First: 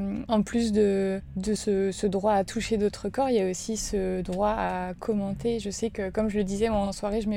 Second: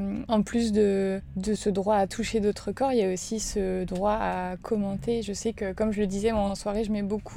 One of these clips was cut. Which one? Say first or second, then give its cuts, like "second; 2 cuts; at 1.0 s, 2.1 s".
second; 1 cut; at 1.6 s